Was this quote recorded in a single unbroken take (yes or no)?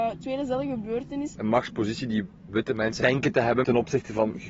no